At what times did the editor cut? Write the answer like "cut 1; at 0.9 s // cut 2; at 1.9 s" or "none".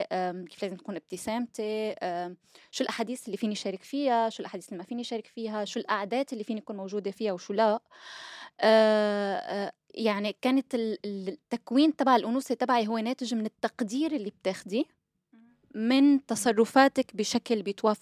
cut 1; at 10.4 s